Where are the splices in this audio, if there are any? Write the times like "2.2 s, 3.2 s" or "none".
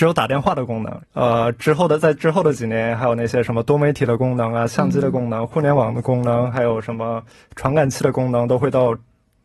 1.0 s